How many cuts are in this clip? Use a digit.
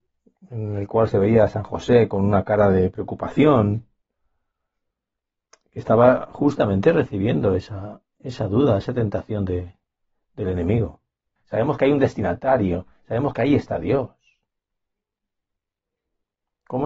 1